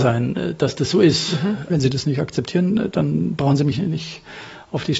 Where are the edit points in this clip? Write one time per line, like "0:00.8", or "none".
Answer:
0:01.7